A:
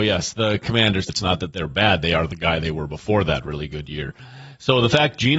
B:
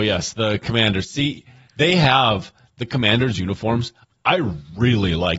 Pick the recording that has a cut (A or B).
A